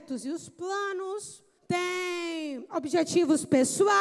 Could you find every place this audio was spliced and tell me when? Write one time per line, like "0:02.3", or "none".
0:01.6